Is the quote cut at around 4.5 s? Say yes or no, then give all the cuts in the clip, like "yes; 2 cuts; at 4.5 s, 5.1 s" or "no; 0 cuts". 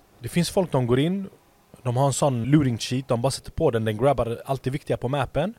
no; 1 cut; at 2.4 s